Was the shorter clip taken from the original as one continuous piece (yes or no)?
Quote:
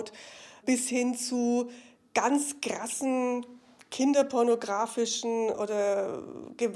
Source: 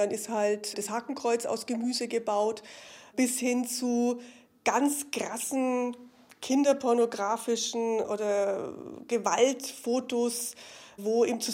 yes